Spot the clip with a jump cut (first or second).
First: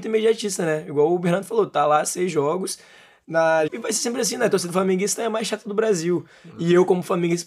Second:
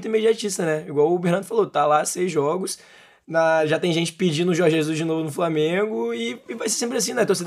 first